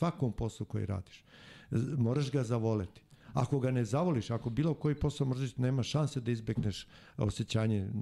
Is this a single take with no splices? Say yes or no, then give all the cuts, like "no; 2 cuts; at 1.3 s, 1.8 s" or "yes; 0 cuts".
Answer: yes; 0 cuts